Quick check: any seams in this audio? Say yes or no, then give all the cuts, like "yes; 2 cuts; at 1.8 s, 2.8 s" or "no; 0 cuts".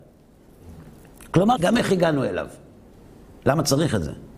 yes; 1 cut; at 1.6 s